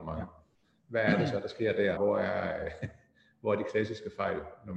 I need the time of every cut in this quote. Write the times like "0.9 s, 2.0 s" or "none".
2.0 s